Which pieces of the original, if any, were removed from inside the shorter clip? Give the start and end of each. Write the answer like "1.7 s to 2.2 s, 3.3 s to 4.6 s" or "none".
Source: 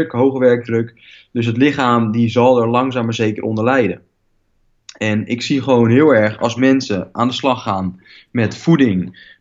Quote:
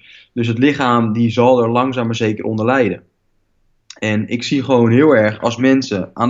none